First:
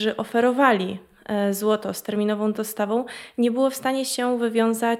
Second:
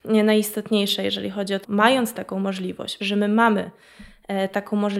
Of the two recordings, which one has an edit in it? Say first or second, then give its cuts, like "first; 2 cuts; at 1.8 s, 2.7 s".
second; 2 cuts; at 1.6 s, 3.0 s